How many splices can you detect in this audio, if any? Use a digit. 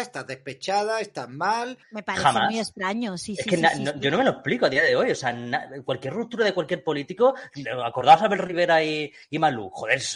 1